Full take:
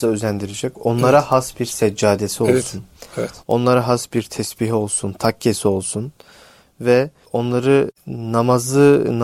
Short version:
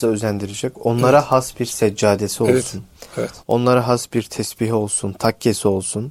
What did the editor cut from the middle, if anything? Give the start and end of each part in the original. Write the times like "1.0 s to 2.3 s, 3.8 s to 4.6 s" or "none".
none